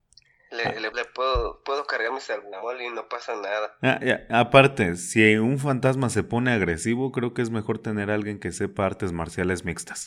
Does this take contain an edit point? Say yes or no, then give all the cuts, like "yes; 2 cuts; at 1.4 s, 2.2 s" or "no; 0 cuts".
yes; 1 cut; at 0.9 s